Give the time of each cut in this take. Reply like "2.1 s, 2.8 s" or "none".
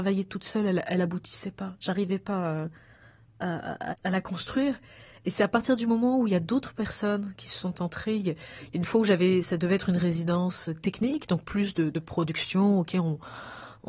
3.9 s